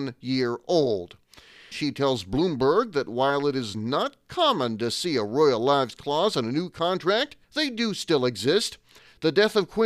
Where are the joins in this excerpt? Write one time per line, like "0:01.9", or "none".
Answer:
0:01.7
0:07.4